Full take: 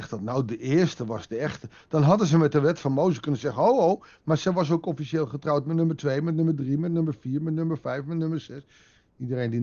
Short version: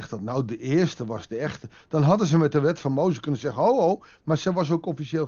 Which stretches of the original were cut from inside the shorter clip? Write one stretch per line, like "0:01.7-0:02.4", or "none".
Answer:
none